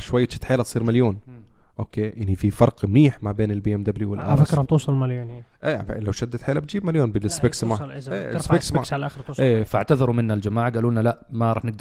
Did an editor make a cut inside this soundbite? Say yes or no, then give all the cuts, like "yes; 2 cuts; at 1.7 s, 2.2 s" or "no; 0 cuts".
yes; 1 cut; at 9.7 s